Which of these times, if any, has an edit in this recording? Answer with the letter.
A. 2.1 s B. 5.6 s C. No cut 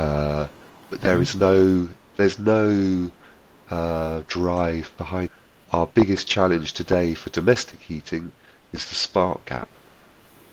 A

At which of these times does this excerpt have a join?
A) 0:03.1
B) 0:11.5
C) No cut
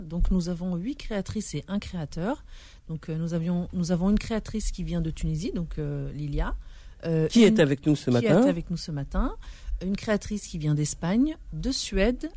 C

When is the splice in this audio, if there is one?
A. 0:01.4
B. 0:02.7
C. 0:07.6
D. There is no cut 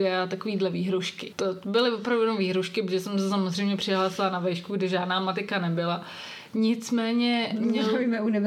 D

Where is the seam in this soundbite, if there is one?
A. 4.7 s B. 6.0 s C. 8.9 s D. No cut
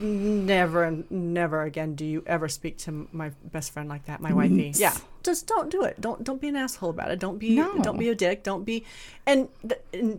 A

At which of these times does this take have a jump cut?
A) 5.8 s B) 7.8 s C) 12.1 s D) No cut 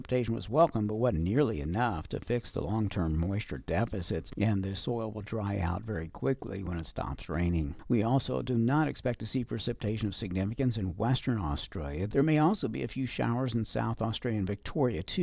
C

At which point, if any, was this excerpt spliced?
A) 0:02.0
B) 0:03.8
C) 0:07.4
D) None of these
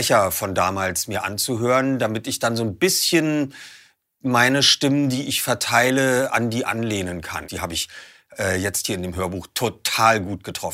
C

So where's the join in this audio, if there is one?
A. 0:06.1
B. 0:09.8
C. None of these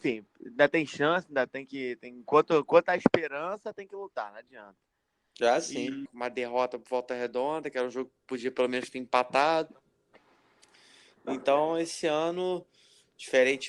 A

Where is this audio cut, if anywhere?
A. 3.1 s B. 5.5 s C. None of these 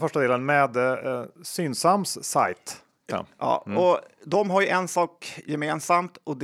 A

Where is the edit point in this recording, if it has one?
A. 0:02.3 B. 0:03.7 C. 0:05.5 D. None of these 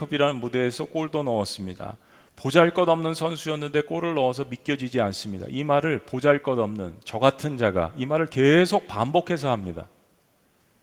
D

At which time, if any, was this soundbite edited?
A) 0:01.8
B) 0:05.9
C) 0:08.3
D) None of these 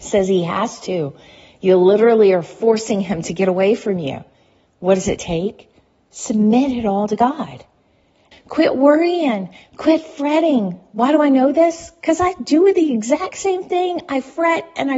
C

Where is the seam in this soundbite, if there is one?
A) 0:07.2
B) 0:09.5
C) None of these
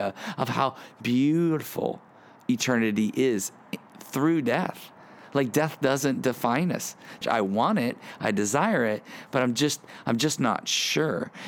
A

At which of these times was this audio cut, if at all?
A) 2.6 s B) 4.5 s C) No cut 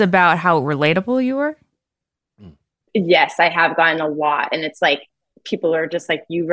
C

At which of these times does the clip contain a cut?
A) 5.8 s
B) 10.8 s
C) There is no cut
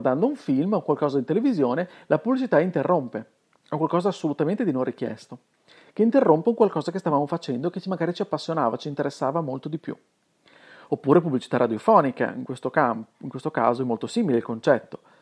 C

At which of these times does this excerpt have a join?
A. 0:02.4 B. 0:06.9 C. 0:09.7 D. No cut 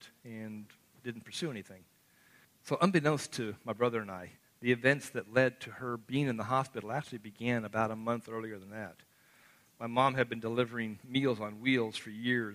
A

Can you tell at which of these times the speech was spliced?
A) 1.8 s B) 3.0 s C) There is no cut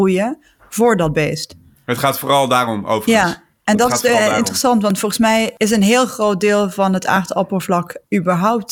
C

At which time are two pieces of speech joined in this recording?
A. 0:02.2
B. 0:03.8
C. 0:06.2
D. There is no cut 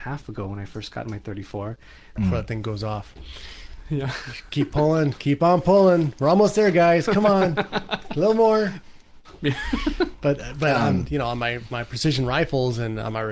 A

